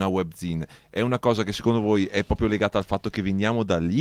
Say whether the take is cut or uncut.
uncut